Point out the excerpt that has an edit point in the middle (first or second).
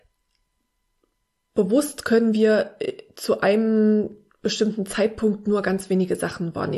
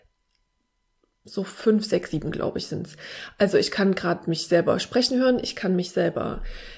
second